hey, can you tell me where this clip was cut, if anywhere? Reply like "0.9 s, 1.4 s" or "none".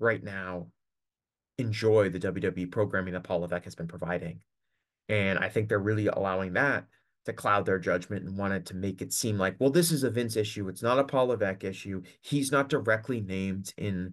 none